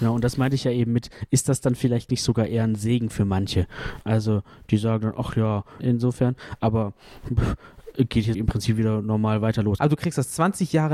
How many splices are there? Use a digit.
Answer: 3